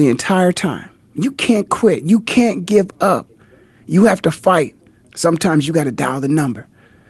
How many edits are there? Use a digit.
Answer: 1